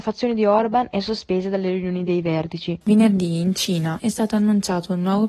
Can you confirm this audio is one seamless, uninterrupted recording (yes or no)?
no